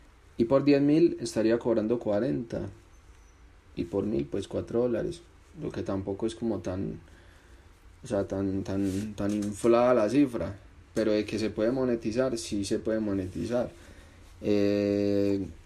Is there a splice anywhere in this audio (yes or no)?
no